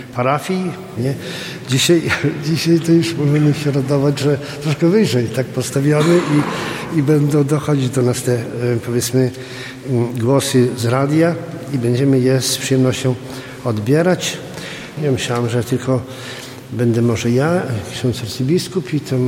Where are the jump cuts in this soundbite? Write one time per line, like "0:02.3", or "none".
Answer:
0:01.0
0:15.0